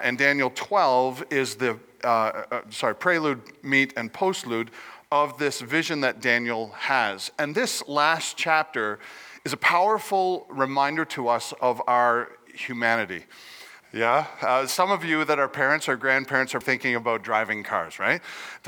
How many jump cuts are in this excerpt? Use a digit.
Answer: 2